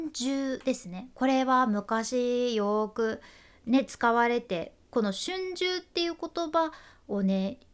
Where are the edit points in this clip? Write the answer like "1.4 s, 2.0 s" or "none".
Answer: 4.4 s